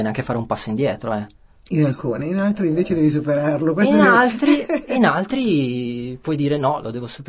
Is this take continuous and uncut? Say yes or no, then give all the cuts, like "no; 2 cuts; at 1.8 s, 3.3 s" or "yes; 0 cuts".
yes; 0 cuts